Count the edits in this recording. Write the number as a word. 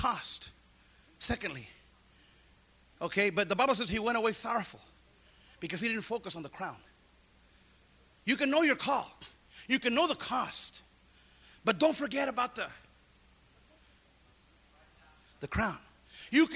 zero